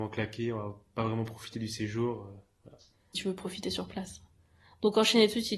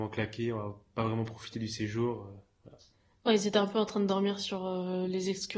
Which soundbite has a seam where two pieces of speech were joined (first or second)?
first